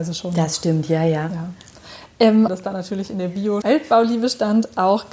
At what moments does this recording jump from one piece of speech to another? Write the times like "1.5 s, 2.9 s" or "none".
2.5 s, 3.6 s